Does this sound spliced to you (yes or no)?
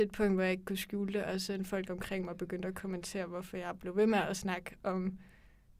no